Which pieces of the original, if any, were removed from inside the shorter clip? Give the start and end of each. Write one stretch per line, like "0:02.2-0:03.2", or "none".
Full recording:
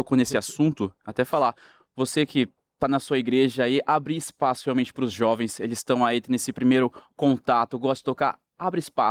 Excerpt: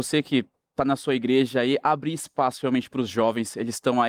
none